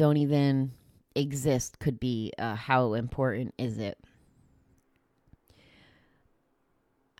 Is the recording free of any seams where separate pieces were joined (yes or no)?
yes